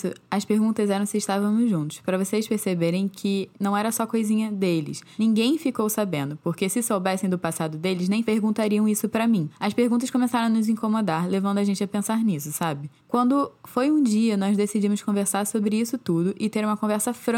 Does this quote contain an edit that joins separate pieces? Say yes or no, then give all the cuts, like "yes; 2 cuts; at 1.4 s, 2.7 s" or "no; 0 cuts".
no; 0 cuts